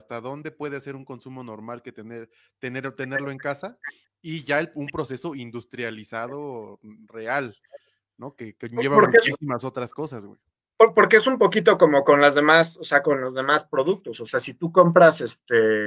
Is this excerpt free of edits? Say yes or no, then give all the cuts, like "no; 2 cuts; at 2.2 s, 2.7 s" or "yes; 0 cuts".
yes; 0 cuts